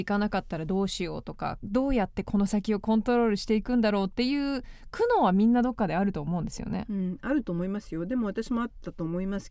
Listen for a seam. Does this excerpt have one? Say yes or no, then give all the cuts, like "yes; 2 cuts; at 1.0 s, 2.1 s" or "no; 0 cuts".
no; 0 cuts